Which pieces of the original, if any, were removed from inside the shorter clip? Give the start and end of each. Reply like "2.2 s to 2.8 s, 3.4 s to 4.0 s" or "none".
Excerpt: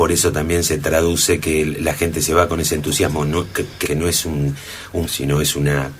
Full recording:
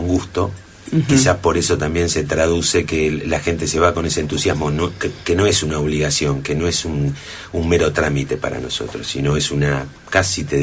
5.3 s to 6.4 s, 7.6 s to 9.0 s